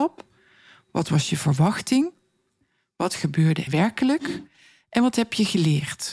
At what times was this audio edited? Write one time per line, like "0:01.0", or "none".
0:03.7